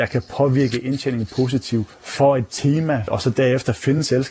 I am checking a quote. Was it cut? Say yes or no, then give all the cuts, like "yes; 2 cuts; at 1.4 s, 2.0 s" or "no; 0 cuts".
no; 0 cuts